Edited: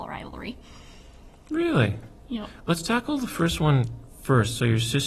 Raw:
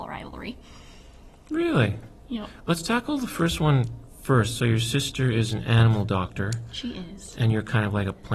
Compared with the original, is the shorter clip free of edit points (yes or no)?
yes